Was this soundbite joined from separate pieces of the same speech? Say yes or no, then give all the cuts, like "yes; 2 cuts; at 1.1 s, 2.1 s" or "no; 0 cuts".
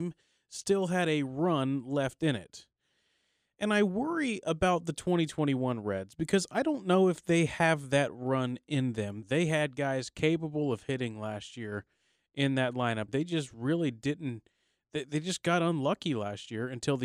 yes; 2 cuts; at 9.2 s, 13.1 s